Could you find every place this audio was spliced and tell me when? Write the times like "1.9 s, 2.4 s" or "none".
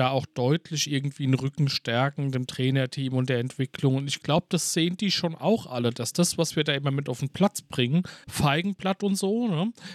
8.2 s

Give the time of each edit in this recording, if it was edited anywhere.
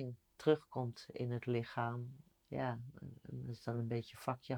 2.3 s

